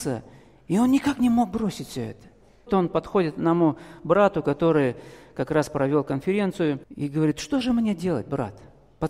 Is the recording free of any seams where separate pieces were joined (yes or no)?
no